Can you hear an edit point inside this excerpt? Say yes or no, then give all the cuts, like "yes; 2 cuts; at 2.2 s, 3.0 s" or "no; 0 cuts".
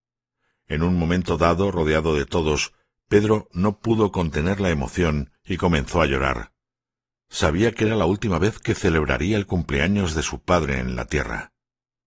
no; 0 cuts